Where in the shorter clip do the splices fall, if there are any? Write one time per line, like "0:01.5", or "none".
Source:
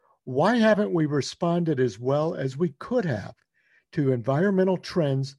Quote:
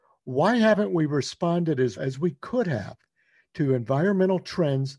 0:02.0